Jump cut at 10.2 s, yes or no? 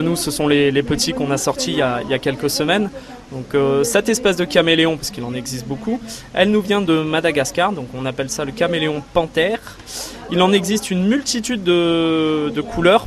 no